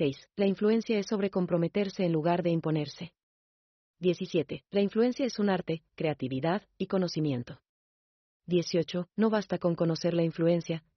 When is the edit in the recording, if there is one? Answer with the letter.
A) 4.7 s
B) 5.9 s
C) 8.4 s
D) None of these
B